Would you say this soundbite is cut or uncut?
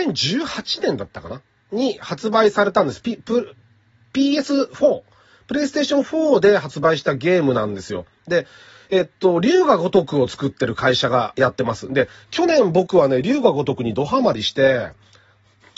uncut